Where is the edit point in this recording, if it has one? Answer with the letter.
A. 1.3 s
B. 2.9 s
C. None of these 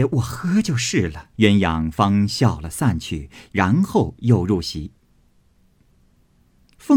A